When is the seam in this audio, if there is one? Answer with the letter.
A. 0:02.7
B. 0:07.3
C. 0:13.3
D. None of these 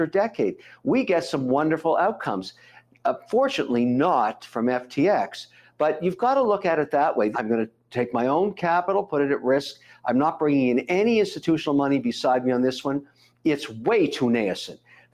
B